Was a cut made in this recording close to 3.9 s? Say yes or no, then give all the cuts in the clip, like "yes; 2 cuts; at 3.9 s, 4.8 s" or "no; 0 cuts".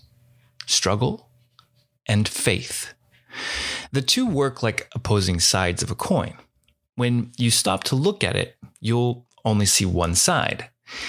no; 0 cuts